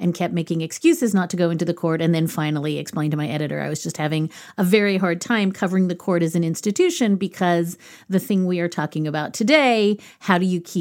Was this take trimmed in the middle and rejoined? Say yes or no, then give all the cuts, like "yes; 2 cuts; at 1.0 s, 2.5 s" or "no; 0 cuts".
no; 0 cuts